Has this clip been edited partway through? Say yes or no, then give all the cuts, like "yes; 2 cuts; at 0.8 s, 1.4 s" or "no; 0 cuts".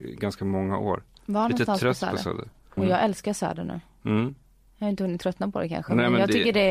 yes; 1 cut; at 2.8 s